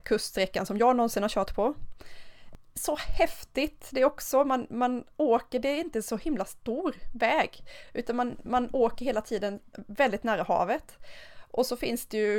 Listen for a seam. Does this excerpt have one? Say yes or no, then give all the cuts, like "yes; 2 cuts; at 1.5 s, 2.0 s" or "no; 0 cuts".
no; 0 cuts